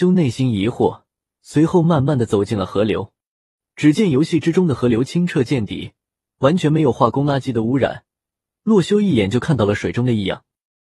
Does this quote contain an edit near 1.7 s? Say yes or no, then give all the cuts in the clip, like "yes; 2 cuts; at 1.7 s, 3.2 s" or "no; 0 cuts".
no; 0 cuts